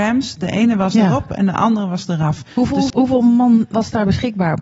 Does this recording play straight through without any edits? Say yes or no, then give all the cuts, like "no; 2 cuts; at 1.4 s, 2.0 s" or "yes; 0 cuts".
no; 1 cut; at 2.9 s